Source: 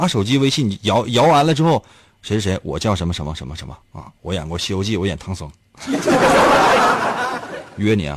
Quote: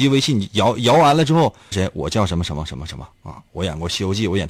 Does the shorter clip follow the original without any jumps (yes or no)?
no